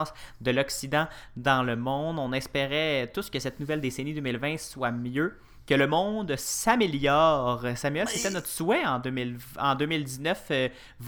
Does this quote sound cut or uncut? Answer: uncut